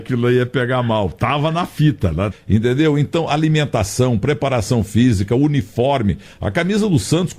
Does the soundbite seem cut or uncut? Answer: cut